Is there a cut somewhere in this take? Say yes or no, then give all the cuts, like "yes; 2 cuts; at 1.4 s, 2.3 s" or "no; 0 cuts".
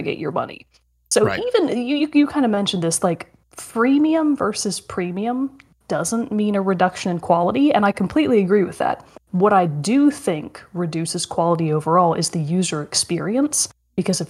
no; 0 cuts